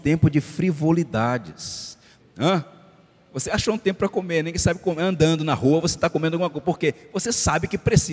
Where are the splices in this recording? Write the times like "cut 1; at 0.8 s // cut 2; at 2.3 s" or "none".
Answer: cut 1; at 2.2 s